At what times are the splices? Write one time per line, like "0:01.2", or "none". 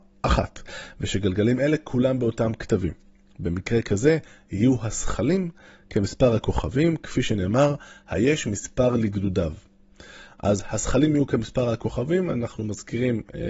none